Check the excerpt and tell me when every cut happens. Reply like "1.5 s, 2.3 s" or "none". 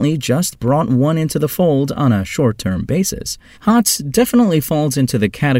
3.5 s